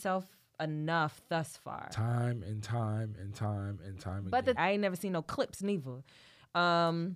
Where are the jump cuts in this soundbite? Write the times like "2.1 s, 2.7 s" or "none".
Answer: 4.6 s